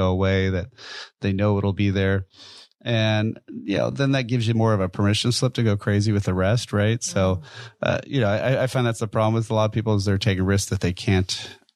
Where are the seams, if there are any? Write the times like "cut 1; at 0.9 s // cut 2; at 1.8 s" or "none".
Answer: none

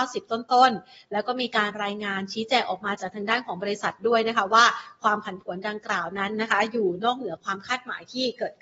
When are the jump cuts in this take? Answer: none

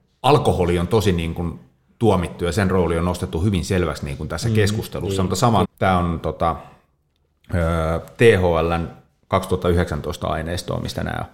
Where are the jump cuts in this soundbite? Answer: cut 1; at 5.6 s

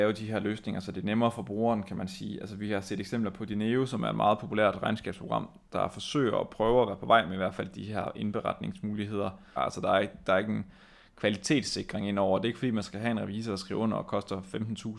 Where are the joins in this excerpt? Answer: cut 1; at 9.6 s

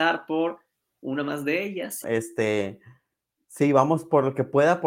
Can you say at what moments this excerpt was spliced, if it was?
cut 1; at 2.0 s

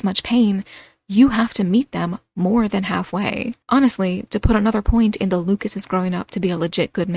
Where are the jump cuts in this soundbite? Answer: cut 1; at 3.6 s

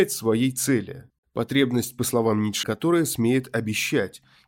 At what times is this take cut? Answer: cut 1; at 1.2 s // cut 2; at 2.6 s

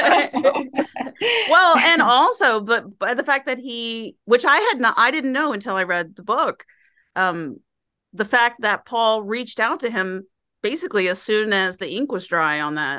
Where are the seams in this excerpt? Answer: none

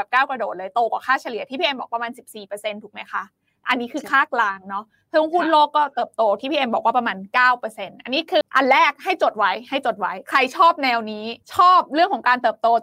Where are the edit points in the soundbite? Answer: cut 1; at 8.4 s // cut 2; at 11.4 s

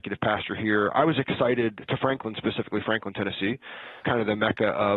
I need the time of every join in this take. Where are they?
cut 1; at 4.0 s

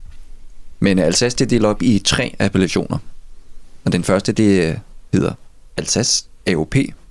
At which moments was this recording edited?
none

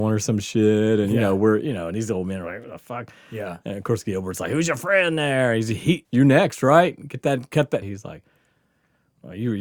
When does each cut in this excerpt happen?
cut 1; at 6.0 s // cut 2; at 7.8 s

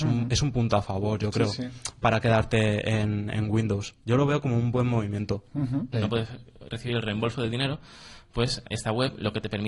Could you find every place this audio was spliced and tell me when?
cut 1; at 4.0 s // cut 2; at 5.9 s // cut 3; at 8.6 s

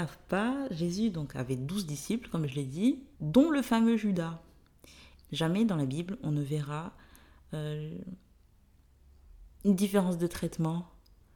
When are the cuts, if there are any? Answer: cut 1; at 3.1 s // cut 2; at 5.2 s

